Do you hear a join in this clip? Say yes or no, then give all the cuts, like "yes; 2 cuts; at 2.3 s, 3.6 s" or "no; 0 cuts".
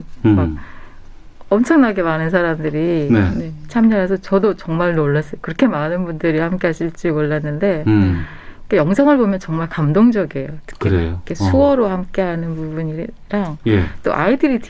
no; 0 cuts